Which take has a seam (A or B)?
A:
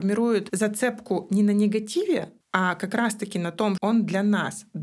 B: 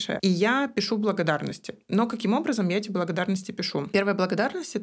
A